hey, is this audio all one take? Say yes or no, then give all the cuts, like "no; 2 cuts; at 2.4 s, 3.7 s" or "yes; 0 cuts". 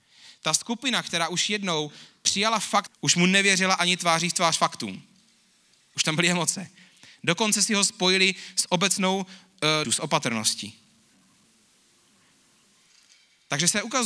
no; 2 cuts; at 2.9 s, 9.8 s